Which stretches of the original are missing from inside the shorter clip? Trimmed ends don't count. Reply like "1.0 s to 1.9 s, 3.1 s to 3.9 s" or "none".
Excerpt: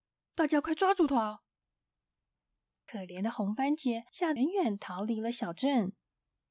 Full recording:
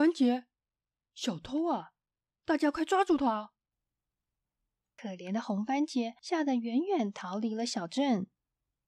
6.5 s to 6.7 s